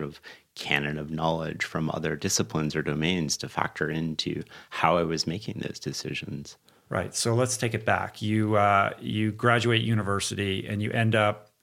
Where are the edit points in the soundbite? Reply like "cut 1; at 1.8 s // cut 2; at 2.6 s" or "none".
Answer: none